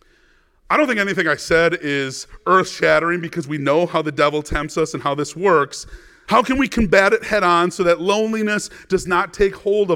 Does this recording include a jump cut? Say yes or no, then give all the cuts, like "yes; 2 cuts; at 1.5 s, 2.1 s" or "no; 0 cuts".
yes; 1 cut; at 6.2 s